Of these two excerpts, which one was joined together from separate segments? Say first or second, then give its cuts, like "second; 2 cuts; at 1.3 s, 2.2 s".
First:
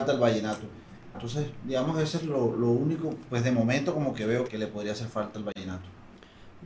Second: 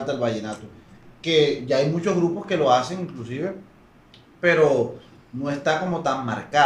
first; 2 cuts; at 1.1 s, 4.5 s